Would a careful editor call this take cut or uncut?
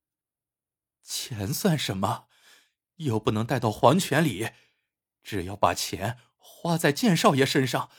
uncut